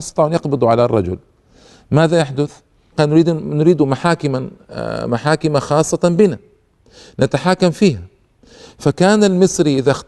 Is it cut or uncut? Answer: cut